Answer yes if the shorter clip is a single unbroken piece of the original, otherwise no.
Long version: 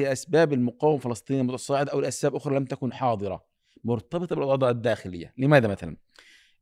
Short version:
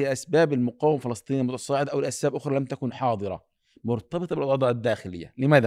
yes